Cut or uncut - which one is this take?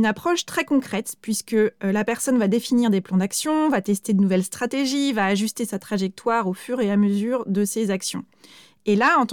uncut